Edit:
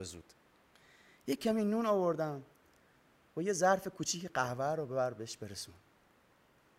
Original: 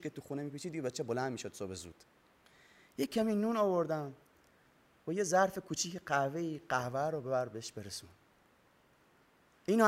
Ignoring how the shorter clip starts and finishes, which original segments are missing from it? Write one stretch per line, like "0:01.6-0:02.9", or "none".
0:06.0-0:06.6